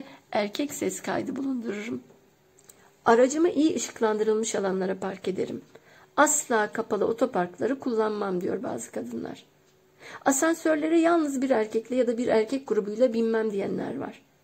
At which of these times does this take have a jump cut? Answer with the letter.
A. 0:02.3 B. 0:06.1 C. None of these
C